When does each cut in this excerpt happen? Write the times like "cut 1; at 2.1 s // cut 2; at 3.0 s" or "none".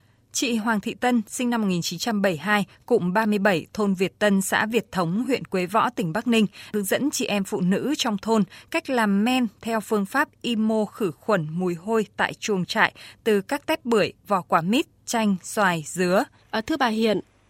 cut 1; at 16.4 s